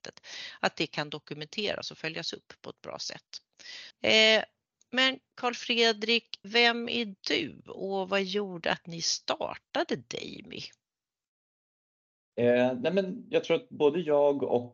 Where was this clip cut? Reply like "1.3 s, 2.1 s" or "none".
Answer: 3.9 s, 6.4 s